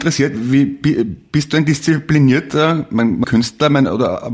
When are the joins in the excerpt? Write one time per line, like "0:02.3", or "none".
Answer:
0:03.2